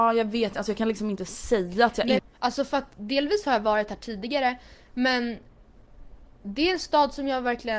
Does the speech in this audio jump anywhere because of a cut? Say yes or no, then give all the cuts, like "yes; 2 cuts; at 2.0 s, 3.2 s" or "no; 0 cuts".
yes; 1 cut; at 2.2 s